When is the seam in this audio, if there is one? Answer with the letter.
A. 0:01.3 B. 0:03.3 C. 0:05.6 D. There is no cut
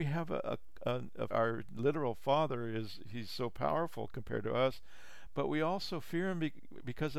A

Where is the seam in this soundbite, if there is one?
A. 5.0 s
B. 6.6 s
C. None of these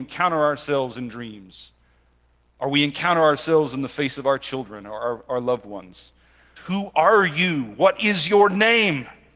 B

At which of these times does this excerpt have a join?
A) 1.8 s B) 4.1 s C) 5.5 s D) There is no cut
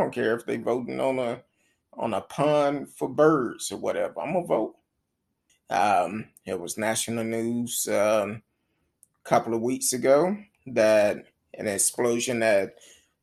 C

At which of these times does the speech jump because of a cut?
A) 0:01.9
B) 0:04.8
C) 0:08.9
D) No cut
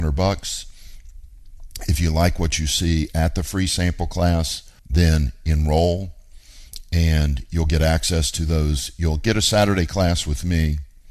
B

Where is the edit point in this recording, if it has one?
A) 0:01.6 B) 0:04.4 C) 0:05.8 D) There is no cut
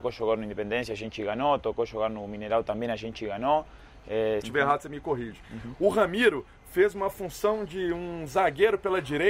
B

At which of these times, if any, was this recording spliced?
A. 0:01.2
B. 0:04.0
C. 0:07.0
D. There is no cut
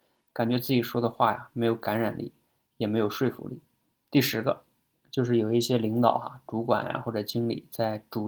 B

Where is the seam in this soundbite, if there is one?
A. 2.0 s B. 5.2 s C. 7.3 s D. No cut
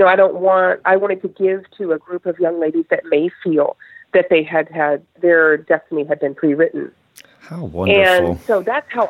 B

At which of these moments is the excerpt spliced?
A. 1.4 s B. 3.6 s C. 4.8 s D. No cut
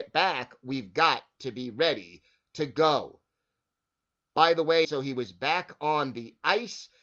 C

